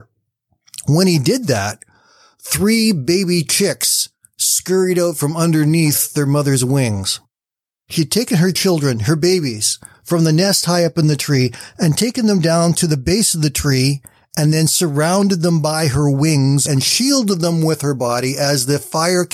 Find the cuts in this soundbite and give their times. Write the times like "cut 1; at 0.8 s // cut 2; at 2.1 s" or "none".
none